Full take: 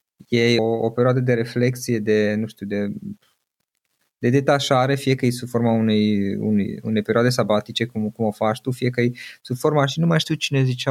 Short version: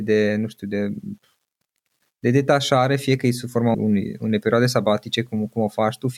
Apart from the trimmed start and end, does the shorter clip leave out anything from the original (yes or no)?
yes